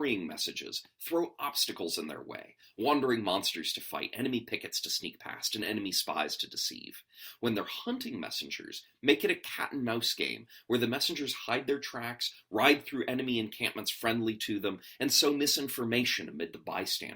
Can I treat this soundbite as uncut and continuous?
yes; 0 cuts

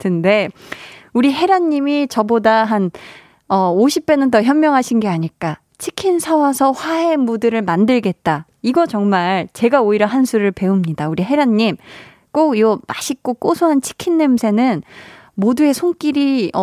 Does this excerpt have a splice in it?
no; 0 cuts

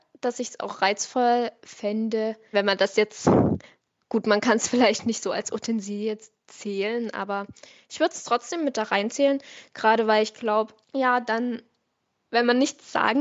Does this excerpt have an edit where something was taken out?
yes; 2 cuts; at 2.5 s, 10.8 s

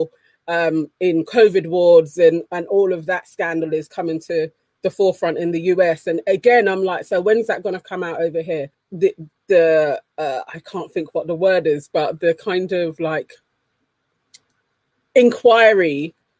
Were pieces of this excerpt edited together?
yes; 1 cut; at 8.7 s

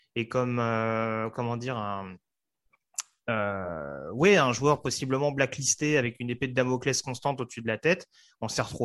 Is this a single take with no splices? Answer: yes; 0 cuts

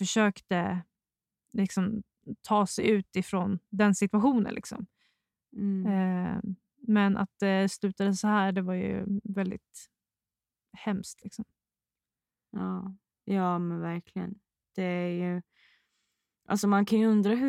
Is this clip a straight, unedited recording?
yes; 0 cuts

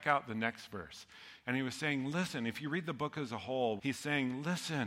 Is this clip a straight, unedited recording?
no; 2 cuts; at 1.4 s, 3.8 s

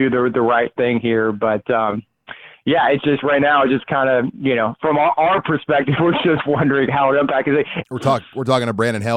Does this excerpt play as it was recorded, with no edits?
no; 1 cut; at 7.8 s

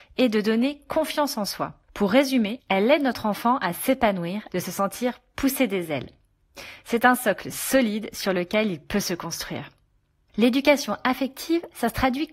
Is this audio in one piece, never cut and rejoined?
no; 1 cut; at 4.5 s

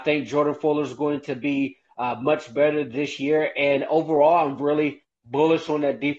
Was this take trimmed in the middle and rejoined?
no; 0 cuts

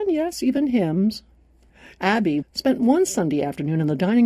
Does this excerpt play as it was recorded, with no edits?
no; 1 cut; at 2.4 s

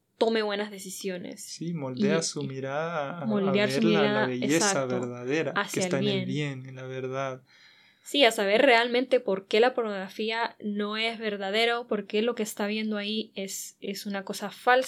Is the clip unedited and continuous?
yes; 0 cuts

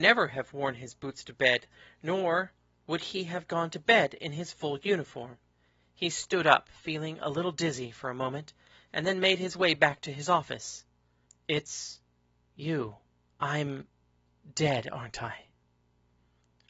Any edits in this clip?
yes; 2 cuts; at 11.3 s, 13.3 s

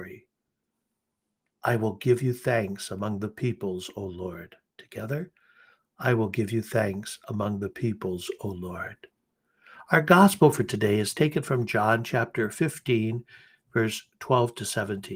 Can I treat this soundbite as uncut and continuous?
yes; 0 cuts

